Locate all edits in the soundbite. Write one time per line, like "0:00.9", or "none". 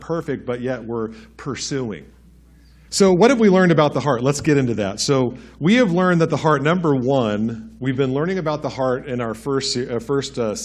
0:02.9